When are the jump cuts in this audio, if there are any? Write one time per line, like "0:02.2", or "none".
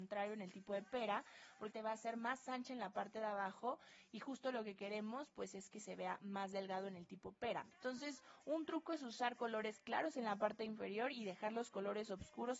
0:01.7
0:07.7